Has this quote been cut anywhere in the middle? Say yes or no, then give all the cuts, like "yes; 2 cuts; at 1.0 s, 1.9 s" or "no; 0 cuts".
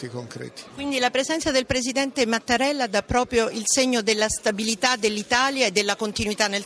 no; 0 cuts